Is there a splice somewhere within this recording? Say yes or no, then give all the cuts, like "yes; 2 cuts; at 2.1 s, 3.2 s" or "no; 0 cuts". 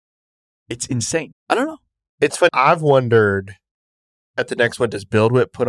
yes; 2 cuts; at 1.3 s, 2.5 s